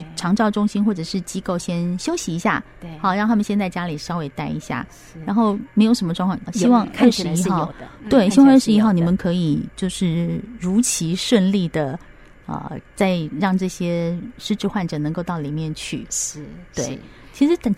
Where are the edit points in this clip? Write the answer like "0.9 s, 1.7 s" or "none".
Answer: 6.5 s